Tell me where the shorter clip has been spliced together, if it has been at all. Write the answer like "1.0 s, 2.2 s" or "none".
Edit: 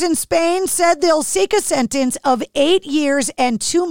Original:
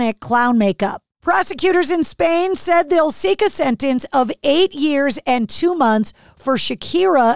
none